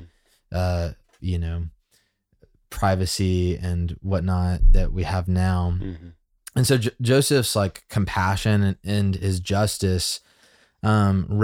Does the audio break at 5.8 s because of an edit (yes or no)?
no